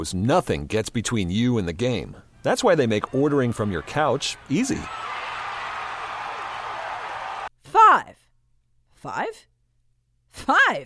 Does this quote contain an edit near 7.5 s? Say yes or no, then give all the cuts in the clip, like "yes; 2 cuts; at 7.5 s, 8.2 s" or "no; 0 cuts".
yes; 1 cut; at 7.5 s